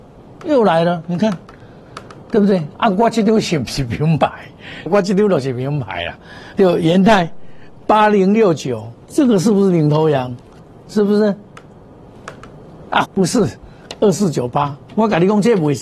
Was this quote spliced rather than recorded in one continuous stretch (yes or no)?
yes